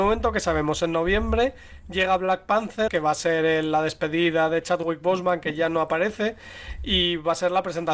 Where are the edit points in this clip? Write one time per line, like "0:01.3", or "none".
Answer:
0:02.9